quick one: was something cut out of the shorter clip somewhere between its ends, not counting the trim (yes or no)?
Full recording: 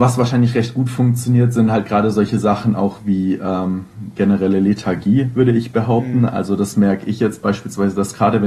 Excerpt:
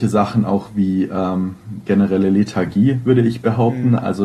no